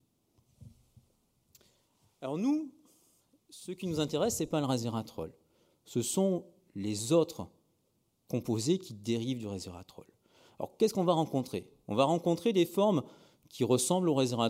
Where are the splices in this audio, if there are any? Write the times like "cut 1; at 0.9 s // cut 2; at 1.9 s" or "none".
none

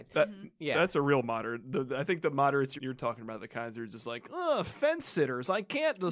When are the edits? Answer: cut 1; at 2.8 s

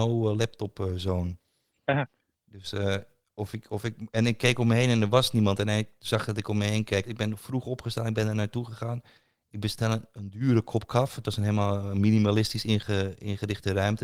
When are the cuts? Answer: cut 1; at 7.0 s

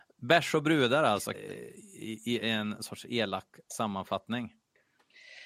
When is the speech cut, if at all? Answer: cut 1; at 1.3 s

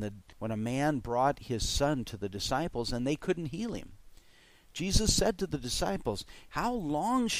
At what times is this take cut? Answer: cut 1; at 6.5 s

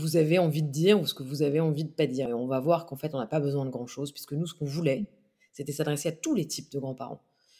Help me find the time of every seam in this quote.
cut 1; at 2.3 s

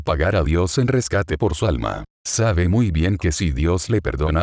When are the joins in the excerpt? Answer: none

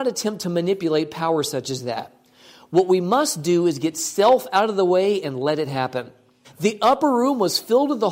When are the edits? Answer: cut 1; at 6.4 s

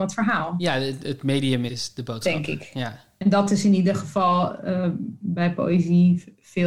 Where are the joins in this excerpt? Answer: cut 1; at 1.7 s

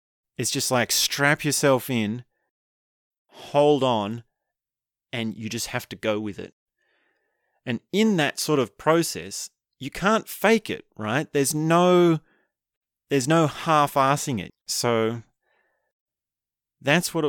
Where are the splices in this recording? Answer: cut 1; at 14.5 s

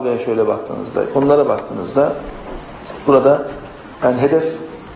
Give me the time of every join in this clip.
cut 1; at 1.1 s

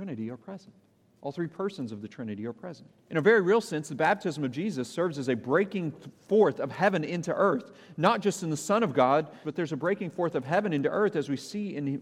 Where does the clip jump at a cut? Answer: cut 1; at 3.0 s // cut 2; at 9.4 s

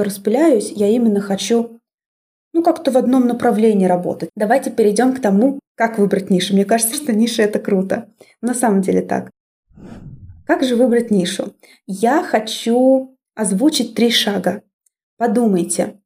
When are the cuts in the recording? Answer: cut 1; at 4.3 s // cut 2; at 6.9 s // cut 3; at 15.0 s

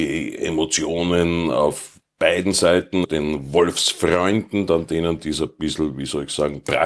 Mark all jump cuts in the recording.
cut 1; at 3.0 s

